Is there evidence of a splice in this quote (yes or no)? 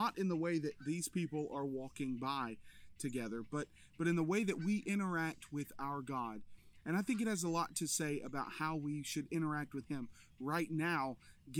no